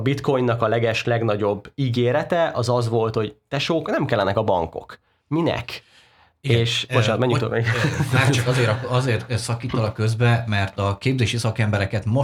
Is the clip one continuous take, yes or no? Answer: yes